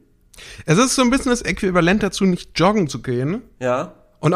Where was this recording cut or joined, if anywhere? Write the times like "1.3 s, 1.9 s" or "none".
none